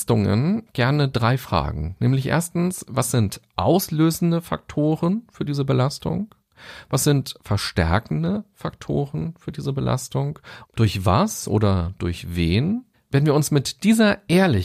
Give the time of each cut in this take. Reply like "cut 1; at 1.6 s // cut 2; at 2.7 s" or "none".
cut 1; at 10.6 s // cut 2; at 12.9 s

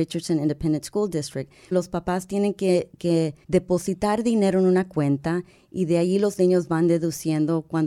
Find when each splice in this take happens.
cut 1; at 1.7 s // cut 2; at 3.4 s

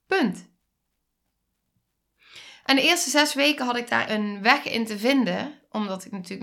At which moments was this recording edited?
cut 1; at 4.1 s

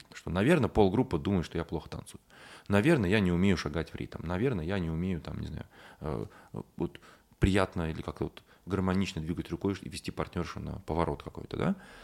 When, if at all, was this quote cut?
none

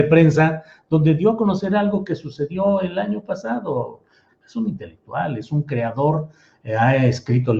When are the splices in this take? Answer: cut 1; at 4.3 s

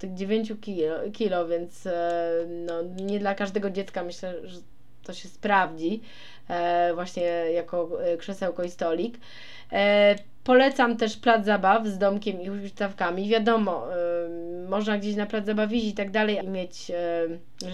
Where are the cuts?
cut 1; at 16.4 s

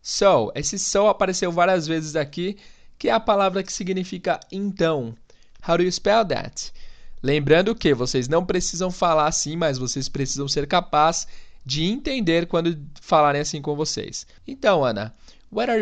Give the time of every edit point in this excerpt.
cut 1; at 5.6 s // cut 2; at 14.4 s

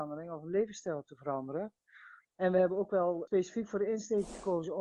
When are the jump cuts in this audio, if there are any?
cut 1; at 2.2 s

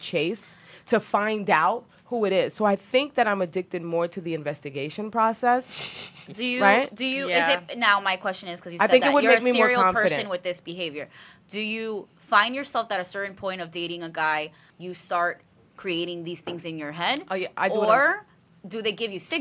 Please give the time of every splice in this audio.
cut 1; at 14.7 s

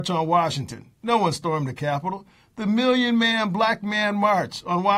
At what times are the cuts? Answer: none

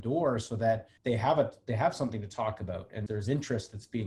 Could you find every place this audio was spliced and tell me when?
cut 1; at 1.0 s // cut 2; at 3.1 s

